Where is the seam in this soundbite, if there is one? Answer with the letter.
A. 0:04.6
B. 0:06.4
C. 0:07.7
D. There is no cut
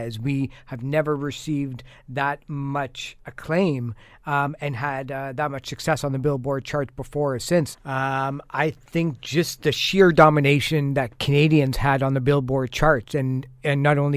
C